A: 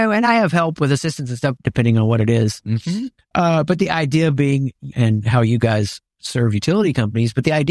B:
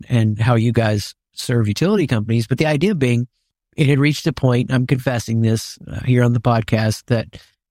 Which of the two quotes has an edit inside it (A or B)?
A